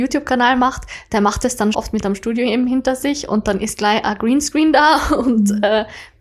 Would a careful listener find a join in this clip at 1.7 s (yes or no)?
yes